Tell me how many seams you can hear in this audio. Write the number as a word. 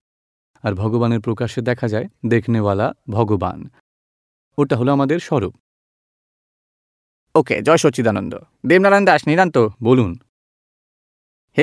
zero